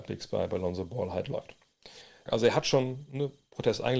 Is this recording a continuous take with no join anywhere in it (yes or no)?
no